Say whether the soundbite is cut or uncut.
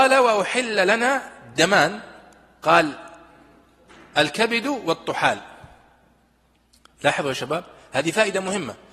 uncut